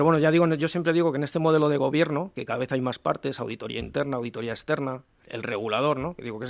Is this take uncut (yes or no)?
no